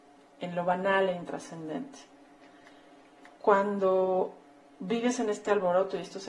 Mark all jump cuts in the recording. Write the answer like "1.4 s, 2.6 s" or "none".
3.4 s